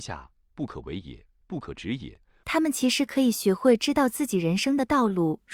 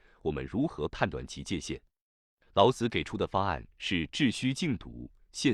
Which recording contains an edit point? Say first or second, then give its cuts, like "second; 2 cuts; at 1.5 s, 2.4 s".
first; 1 cut; at 2.4 s